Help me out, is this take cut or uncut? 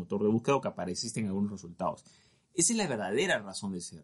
uncut